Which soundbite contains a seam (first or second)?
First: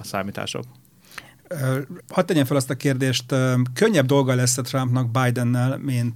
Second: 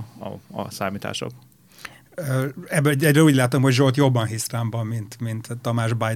first